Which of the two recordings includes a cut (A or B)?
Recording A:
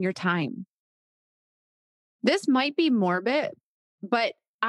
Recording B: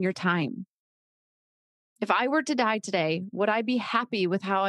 B